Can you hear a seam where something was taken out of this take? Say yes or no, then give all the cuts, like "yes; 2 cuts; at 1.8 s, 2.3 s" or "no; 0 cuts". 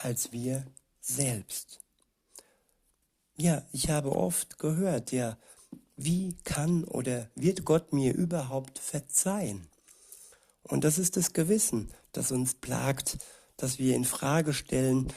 no; 0 cuts